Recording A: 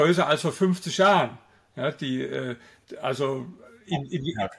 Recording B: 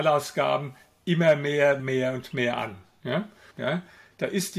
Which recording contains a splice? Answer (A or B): B